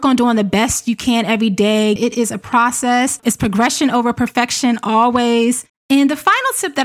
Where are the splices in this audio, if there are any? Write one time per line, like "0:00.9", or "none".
0:02.0
0:05.7